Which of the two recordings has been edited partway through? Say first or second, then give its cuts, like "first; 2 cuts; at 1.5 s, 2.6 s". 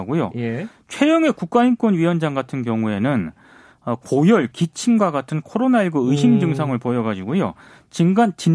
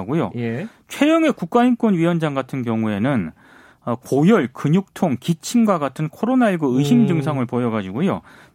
first; 1 cut; at 4.5 s